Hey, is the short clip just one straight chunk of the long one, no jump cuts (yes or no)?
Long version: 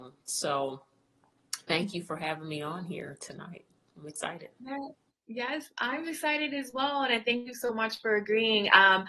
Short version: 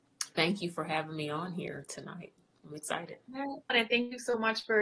no